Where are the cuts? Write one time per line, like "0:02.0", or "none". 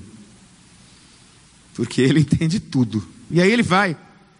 0:03.3